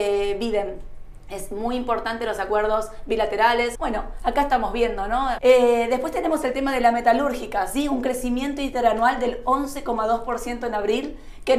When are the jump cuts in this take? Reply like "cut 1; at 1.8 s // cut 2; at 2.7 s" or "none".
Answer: cut 1; at 3.7 s // cut 2; at 5.4 s